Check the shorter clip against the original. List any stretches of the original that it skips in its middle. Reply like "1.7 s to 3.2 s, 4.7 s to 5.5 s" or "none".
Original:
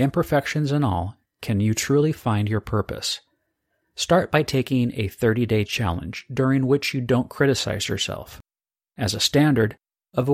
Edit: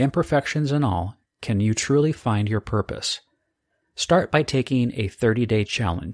none

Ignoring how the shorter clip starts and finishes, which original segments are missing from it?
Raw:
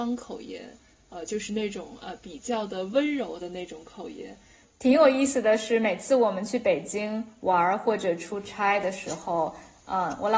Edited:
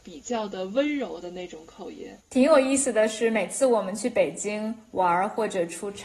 4.4 s to 4.7 s

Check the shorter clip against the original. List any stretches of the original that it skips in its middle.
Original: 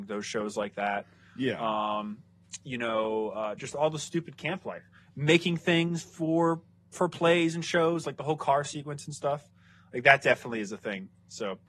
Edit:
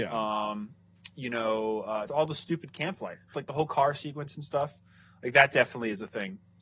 3.6 s to 3.7 s, 5.0 s to 8.0 s

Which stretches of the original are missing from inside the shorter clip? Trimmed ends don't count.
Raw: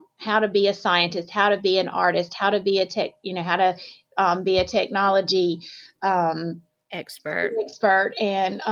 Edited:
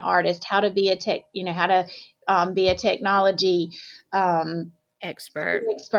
none

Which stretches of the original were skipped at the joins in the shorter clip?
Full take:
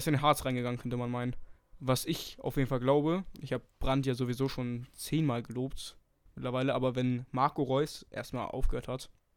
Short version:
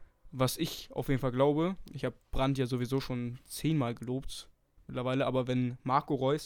none

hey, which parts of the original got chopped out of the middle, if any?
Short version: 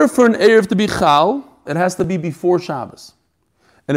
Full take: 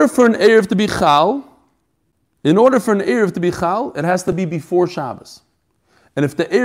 1.7 s to 3.9 s

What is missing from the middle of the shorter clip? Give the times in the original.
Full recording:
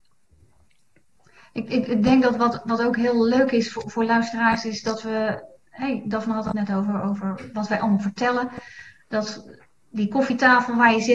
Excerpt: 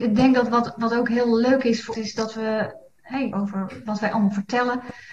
3.8 s to 4.6 s, 6.0 s to 7.0 s

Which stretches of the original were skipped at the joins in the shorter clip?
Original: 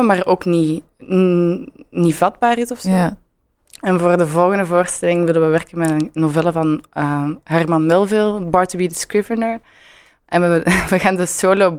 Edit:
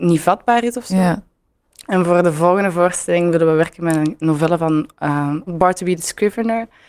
7.4 s to 8.4 s

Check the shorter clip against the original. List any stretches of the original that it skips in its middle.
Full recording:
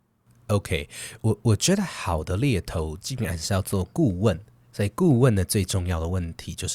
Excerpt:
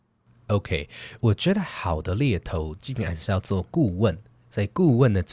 1.2 s to 1.4 s

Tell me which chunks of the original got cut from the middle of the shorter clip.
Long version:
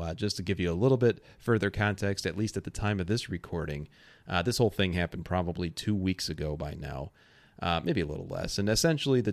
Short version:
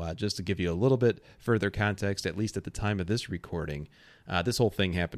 none

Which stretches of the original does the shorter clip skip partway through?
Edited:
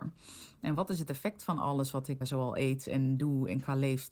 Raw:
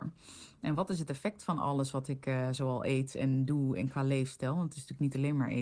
2.2 s to 2.5 s

